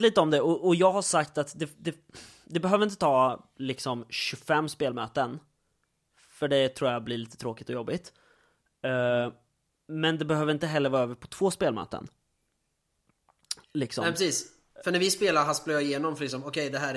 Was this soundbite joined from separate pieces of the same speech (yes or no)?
no